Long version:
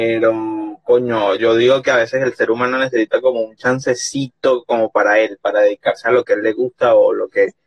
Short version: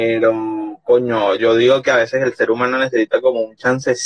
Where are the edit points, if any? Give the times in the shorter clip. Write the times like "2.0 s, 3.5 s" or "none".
none